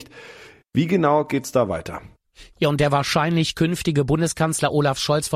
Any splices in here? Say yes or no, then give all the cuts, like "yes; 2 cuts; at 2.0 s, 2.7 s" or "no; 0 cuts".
yes; 1 cut; at 2.5 s